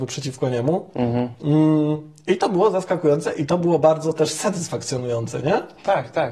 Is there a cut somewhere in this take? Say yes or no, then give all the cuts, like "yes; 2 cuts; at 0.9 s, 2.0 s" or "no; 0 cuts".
no; 0 cuts